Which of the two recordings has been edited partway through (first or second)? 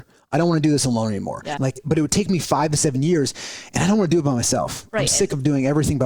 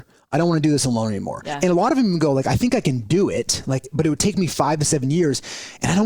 first